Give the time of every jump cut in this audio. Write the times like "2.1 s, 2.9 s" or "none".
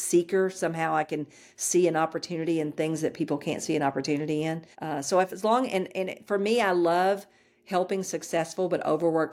4.7 s